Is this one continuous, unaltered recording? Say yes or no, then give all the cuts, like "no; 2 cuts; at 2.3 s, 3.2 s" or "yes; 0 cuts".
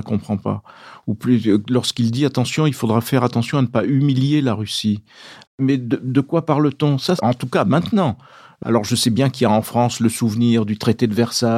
no; 2 cuts; at 5.4 s, 7.2 s